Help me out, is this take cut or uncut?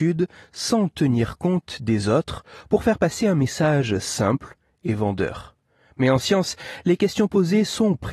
uncut